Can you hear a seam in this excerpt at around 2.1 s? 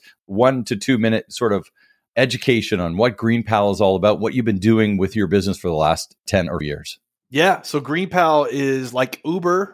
no; 1 cut; at 6.6 s

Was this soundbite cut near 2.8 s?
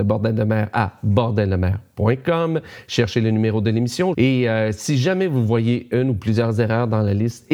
no; 1 cut; at 4.1 s

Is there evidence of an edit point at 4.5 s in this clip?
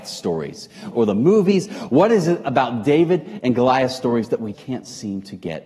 yes; 2 cuts; at 0.9 s, 4.5 s

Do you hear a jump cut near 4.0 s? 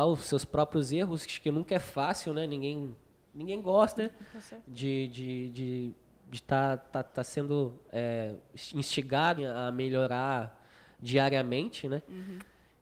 yes; 2 cuts; at 4.0 s, 9.4 s

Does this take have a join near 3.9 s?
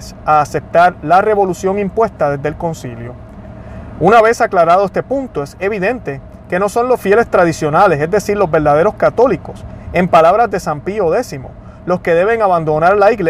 no; 0 cuts

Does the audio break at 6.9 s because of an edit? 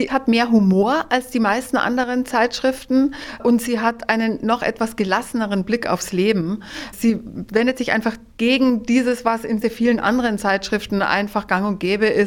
no; 1 cut; at 9.6 s

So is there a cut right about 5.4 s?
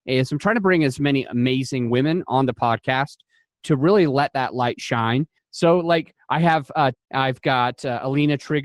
yes; 2 cuts; at 5.4 s, 6.9 s

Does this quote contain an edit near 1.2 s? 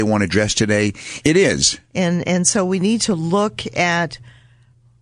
yes; 1 cut; at 1.2 s

